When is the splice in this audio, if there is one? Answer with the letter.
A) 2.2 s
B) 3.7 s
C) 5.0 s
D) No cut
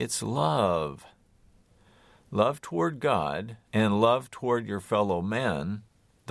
B